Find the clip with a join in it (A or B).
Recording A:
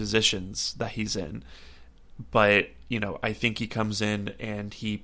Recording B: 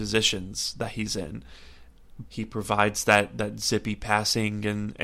B